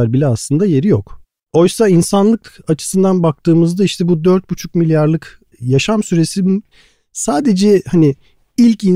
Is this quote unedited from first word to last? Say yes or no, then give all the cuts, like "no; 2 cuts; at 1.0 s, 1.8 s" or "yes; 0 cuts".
no; 1 cut; at 1.4 s